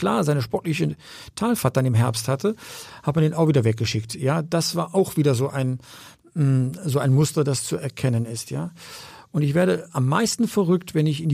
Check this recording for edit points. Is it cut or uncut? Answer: uncut